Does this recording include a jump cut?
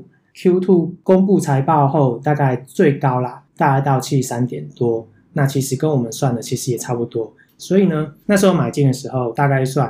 yes; 1 cut; at 7.5 s

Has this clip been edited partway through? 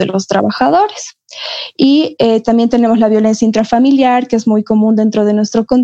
yes; 1 cut; at 1.7 s

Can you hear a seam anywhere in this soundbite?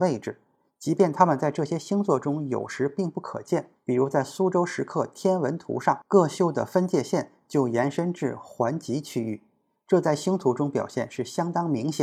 yes; 1 cut; at 3.8 s

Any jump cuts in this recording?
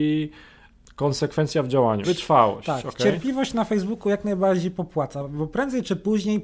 yes; 1 cut; at 2.0 s

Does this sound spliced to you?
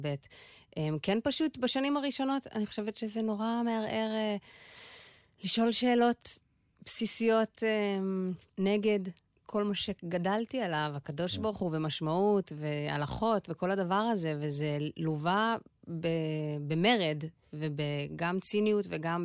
no; 0 cuts

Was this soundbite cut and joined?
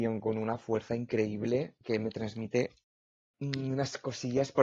no; 0 cuts

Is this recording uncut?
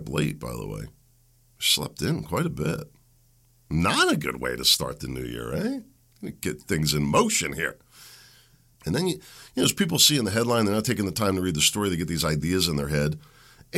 no; 1 cut; at 8.8 s

